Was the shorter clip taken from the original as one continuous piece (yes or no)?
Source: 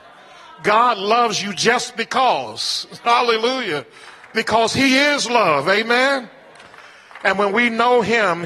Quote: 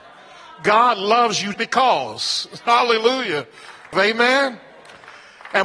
no